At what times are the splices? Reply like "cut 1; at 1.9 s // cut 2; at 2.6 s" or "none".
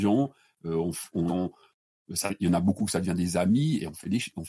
cut 1; at 1.3 s